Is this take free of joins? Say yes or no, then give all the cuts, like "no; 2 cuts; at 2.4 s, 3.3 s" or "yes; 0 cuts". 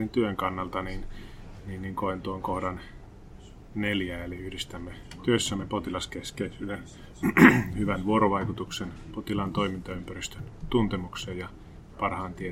yes; 0 cuts